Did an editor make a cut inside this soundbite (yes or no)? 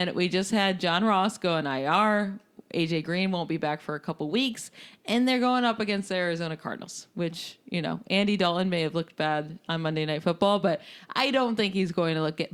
no